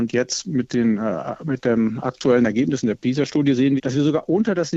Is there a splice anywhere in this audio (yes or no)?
yes